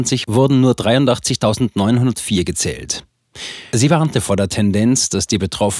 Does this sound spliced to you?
yes; 1 cut; at 3.7 s

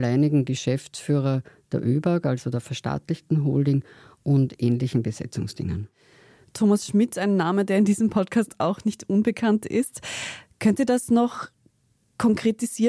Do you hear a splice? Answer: no; 0 cuts

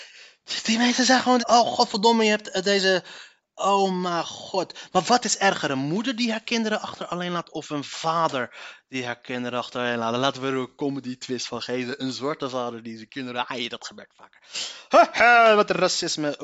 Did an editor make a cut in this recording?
yes; 2 cuts; at 1.4 s, 15.1 s

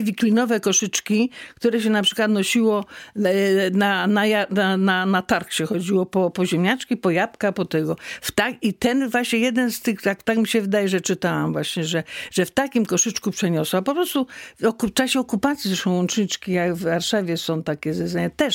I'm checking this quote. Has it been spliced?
no; 0 cuts

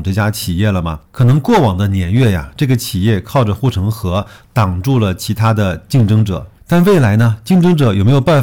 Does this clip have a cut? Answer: yes; 1 cut; at 1.0 s

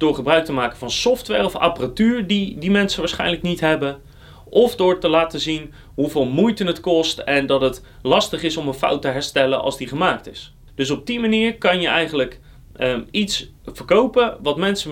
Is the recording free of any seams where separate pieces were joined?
yes; 0 cuts

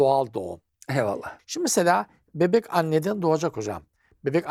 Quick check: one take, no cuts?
no; 1 cut; at 1.4 s

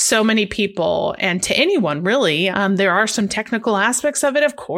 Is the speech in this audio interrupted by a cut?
yes; 1 cut; at 2.5 s

